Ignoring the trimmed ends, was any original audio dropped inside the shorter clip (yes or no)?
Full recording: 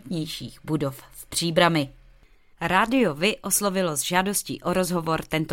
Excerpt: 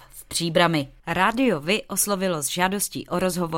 yes